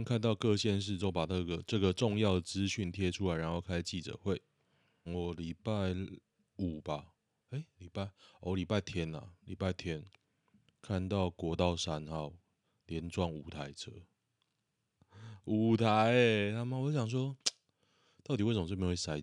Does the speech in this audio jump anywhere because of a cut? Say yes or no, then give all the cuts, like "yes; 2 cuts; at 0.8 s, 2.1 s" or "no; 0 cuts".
yes; 1 cut; at 5.1 s